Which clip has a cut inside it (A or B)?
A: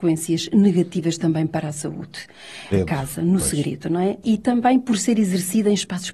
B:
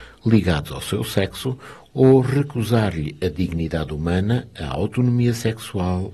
A